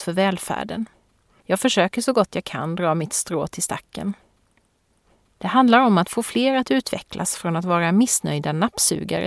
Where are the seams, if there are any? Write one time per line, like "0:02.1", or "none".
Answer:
0:01.4
0:05.3